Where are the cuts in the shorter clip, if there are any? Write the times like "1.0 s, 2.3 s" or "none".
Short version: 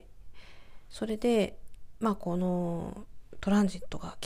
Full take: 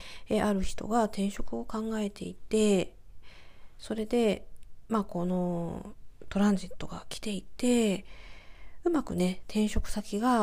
none